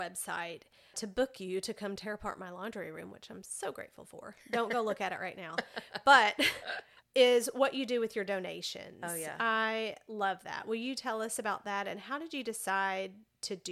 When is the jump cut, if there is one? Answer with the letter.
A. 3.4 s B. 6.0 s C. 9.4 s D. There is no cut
D